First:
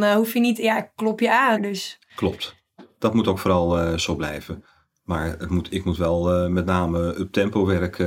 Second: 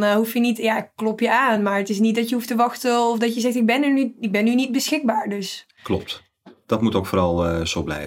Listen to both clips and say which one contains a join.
first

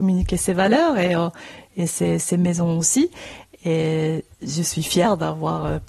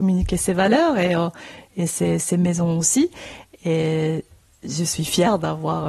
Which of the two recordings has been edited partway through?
first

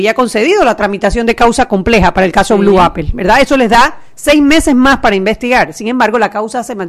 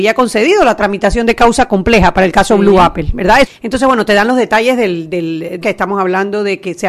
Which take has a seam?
second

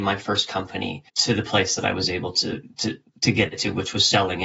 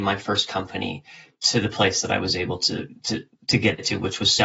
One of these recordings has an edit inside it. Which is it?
first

